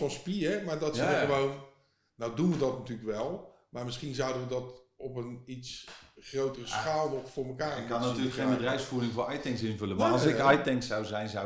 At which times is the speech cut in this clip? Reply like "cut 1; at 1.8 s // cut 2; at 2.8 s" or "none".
none